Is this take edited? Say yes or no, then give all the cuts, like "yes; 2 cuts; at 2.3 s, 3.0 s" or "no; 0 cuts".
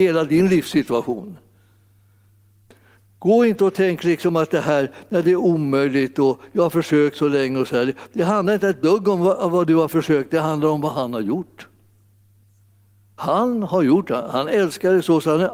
no; 0 cuts